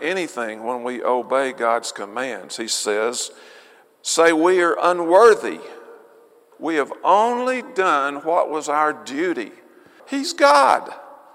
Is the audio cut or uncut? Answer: cut